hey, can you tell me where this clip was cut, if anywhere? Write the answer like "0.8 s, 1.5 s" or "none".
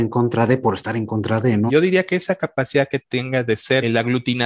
1.7 s